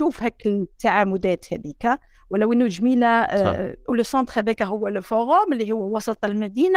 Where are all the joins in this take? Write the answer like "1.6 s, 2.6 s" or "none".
3.8 s